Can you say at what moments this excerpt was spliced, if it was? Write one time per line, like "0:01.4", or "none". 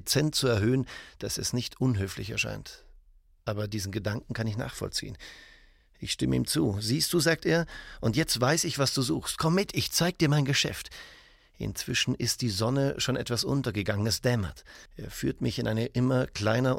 0:14.9